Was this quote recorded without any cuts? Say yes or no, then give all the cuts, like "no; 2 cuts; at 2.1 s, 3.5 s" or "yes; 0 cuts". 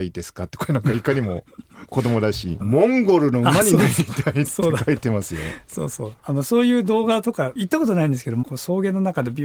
no; 2 cuts; at 2.6 s, 6.2 s